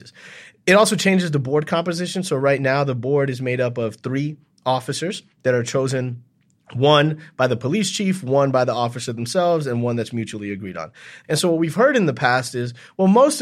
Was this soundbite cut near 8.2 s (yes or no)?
no